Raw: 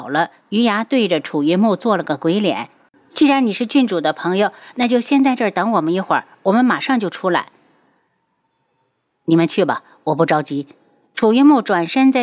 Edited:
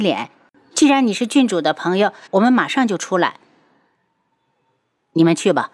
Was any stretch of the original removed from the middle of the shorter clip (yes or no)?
yes